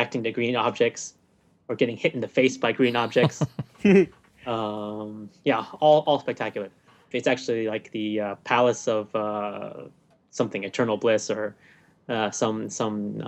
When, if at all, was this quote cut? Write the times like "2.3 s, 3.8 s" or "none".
7.1 s